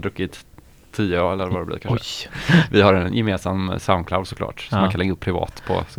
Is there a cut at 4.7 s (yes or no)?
no